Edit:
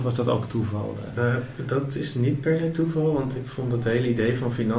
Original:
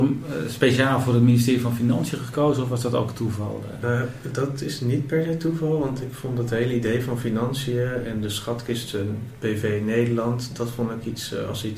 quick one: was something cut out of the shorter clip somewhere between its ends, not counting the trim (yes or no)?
no